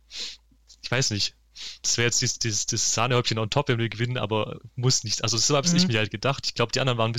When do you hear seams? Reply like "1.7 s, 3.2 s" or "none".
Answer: 1.8 s